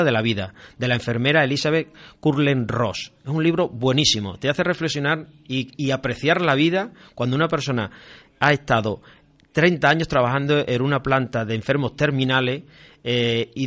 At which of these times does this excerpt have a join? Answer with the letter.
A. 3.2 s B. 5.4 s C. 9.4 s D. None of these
D